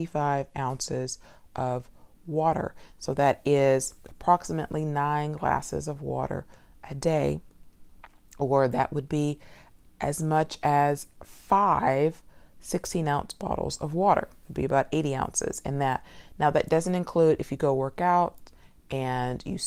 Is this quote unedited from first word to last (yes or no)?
yes